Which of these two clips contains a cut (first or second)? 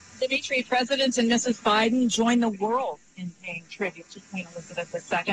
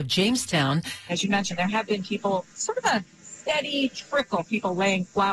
second